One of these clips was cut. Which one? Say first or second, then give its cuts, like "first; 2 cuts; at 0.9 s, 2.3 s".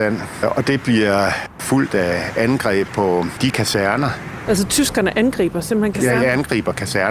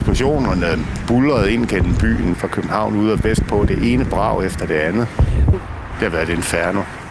second; 2 cuts; at 2.3 s, 5.5 s